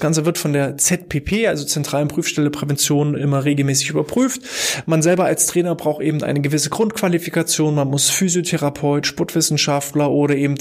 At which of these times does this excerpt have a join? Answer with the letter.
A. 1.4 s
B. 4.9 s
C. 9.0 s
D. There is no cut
C